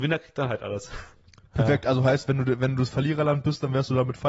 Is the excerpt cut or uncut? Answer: uncut